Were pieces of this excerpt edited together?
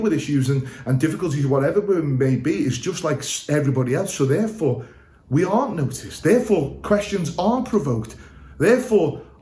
no; 0 cuts

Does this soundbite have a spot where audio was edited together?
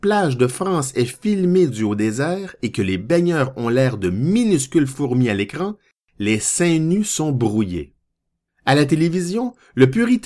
yes; 1 cut; at 8.5 s

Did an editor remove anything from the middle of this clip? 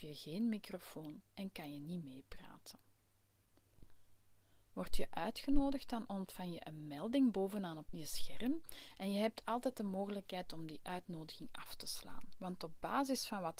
yes; 1 cut; at 7.9 s

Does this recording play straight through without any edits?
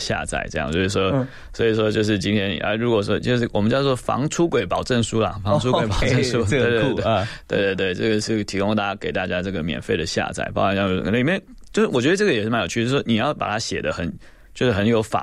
yes; 0 cuts

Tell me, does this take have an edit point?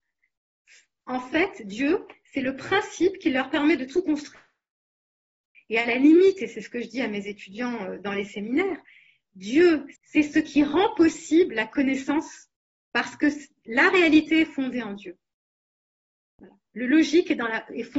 yes; 3 cuts; at 5.5 s, 10.0 s, 16.3 s

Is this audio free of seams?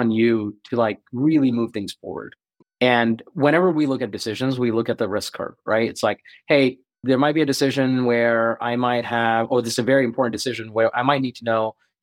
no; 2 cuts; at 2.6 s, 7.0 s

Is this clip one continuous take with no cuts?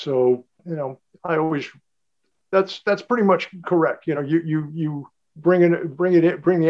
yes; 0 cuts

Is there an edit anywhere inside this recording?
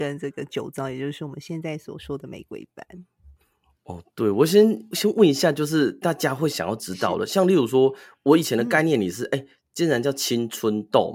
no; 0 cuts

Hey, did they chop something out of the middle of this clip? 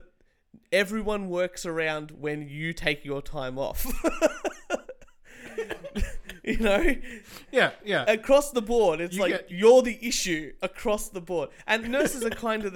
no; 0 cuts

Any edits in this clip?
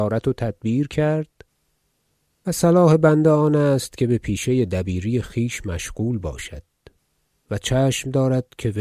no; 0 cuts

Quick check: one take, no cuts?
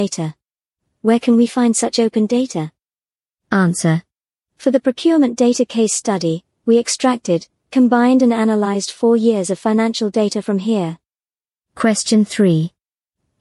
yes; 0 cuts

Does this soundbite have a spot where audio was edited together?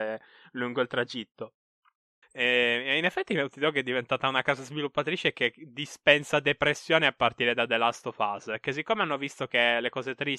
yes; 1 cut; at 2.2 s

